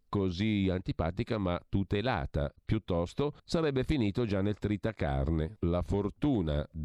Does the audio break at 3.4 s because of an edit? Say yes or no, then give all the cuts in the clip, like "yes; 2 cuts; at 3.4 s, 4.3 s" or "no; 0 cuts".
yes; 2 cuts; at 3.4 s, 5.6 s